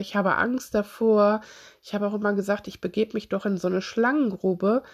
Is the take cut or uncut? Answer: uncut